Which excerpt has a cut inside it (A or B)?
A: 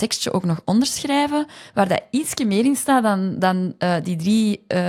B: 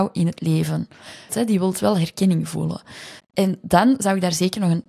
B